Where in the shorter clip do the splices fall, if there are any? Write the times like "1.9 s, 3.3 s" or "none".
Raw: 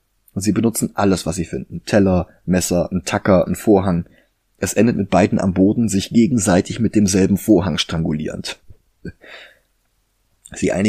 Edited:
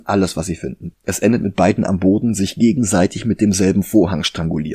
0.9 s